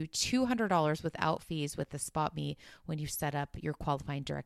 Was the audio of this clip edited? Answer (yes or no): no